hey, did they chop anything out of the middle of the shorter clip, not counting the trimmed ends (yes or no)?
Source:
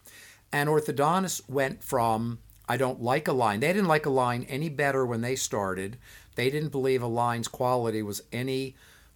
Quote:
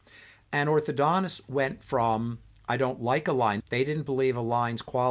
yes